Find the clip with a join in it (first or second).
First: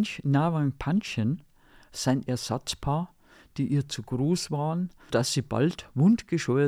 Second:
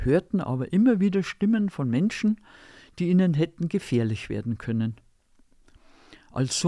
first